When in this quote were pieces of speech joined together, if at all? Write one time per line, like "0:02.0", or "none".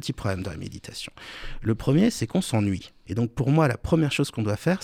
0:03.0